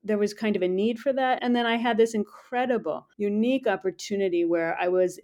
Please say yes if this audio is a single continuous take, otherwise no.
no